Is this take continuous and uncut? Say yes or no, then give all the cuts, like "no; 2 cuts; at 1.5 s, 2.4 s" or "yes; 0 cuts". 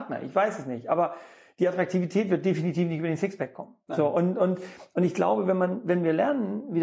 yes; 0 cuts